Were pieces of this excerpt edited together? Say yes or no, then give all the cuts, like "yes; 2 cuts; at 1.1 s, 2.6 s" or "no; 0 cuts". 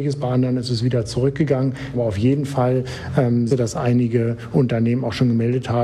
yes; 2 cuts; at 1.9 s, 3.5 s